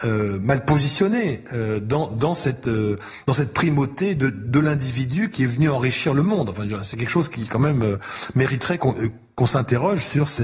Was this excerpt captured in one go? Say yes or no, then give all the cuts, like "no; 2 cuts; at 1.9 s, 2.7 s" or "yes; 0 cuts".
no; 1 cut; at 8.8 s